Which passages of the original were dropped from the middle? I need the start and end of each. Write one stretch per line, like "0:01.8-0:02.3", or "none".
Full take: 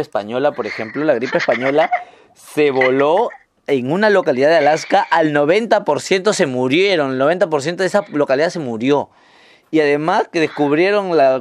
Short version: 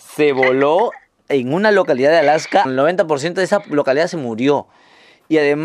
0:05.0-0:07.1

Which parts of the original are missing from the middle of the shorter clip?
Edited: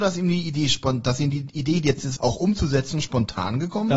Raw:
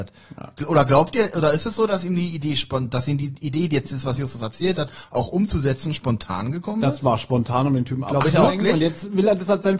0:04.0-0:05.1

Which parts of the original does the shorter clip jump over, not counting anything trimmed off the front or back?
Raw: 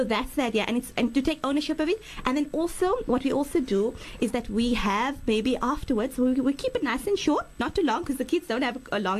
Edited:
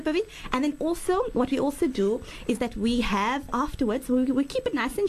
0:05.2-0:05.6

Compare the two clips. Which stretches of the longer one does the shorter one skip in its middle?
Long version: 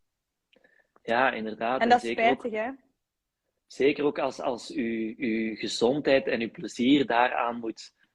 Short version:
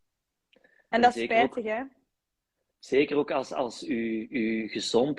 0:00.9-0:01.8

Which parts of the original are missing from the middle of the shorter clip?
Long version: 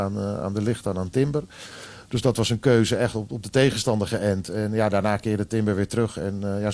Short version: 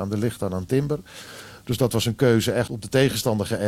0:03.1-0:03.3

